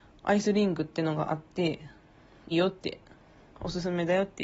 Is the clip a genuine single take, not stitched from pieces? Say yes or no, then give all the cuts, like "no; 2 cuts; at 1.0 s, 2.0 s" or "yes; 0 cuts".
no; 1 cut; at 2.5 s